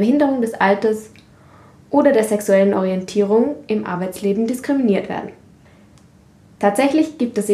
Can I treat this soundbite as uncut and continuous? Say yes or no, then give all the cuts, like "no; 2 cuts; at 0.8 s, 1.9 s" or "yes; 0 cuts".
yes; 0 cuts